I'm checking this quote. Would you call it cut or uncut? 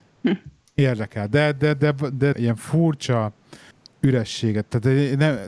cut